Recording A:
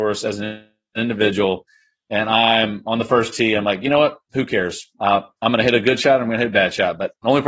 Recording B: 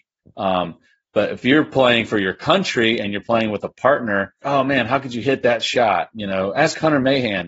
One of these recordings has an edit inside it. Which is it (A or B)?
B